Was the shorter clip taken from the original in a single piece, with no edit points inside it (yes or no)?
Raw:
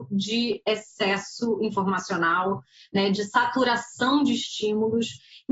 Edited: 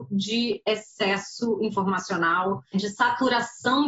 no